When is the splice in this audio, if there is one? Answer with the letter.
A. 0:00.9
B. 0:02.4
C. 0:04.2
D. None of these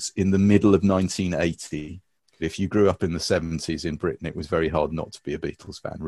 B